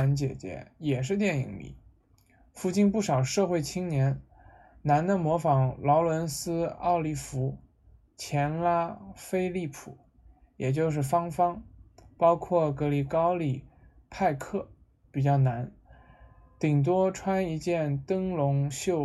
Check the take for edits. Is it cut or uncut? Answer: uncut